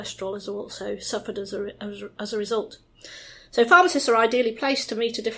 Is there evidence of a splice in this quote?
no; 0 cuts

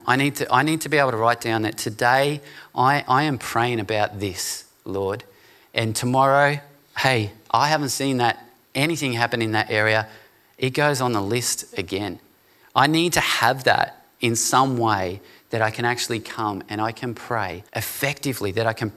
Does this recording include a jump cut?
yes; 2 cuts; at 12.6 s, 17.7 s

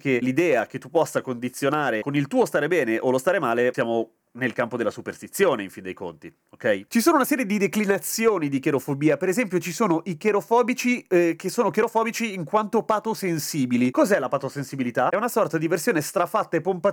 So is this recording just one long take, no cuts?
no; 1 cut; at 6.9 s

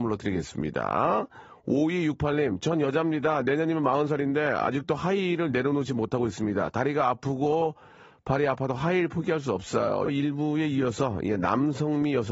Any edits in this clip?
yes; 1 cut; at 10.1 s

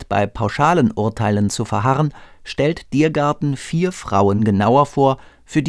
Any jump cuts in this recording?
no; 0 cuts

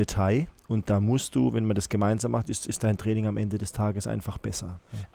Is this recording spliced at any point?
no; 0 cuts

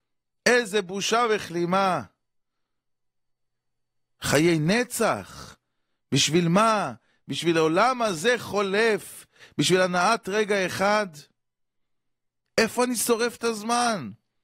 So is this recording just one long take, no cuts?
no; 1 cut; at 12.4 s

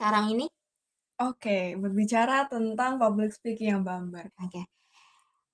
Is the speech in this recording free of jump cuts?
no; 1 cut; at 4.3 s

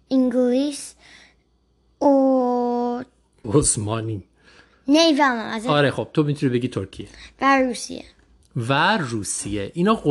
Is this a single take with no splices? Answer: no; 1 cut; at 3.4 s

